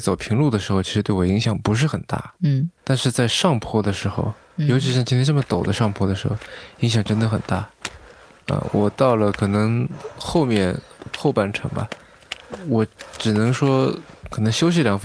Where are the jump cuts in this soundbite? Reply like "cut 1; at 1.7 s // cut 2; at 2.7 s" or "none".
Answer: cut 1; at 2.8 s

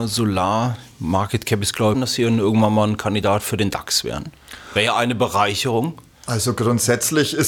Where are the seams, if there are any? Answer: cut 1; at 1.9 s

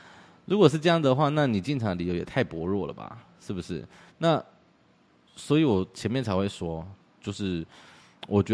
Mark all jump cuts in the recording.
cut 1; at 4.1 s

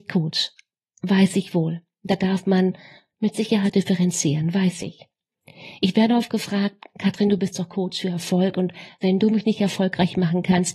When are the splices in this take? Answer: none

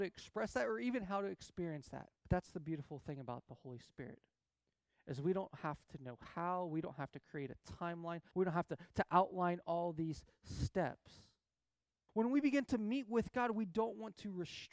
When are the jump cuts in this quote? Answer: cut 1; at 2.2 s // cut 2; at 8.3 s // cut 3; at 12.1 s

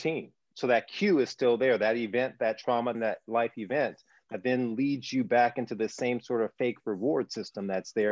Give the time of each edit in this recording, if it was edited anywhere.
cut 1; at 2.9 s

